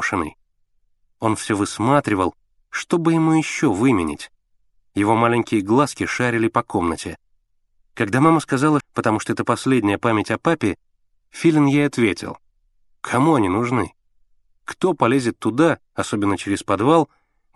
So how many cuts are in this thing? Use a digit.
2